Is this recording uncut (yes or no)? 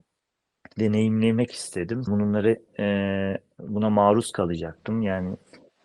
no